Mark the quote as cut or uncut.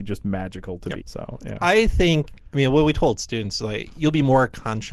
cut